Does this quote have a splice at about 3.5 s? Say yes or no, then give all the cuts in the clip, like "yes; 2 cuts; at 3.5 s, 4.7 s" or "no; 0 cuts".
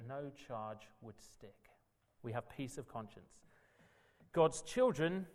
no; 1 cut; at 2.2 s